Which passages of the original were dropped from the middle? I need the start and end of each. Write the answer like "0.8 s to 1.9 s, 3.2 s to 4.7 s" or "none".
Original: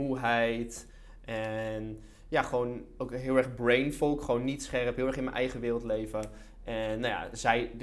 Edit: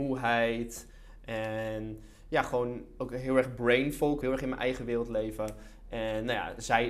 4.2 s to 5.0 s